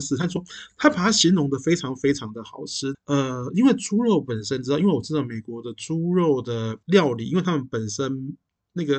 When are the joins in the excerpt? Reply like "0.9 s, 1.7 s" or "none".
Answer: 2.9 s, 6.8 s